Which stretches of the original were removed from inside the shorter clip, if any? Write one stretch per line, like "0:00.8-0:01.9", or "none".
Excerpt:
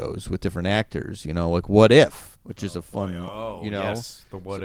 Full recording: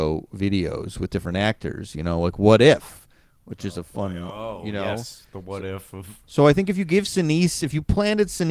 0:03.1-0:03.4